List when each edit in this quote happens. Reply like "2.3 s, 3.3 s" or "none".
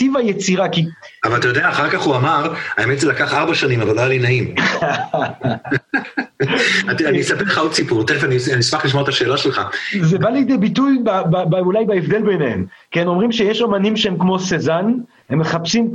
none